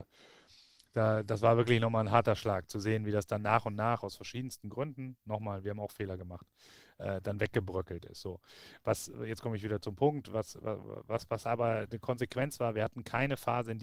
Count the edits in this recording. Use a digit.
0